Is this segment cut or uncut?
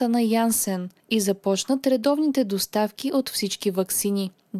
uncut